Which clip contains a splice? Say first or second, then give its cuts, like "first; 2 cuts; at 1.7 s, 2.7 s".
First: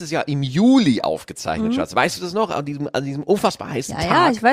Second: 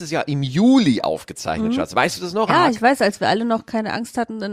second; 1 cut; at 2.5 s